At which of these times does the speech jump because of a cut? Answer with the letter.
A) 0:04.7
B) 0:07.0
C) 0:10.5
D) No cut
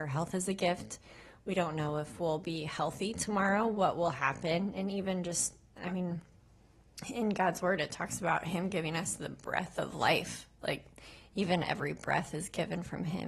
D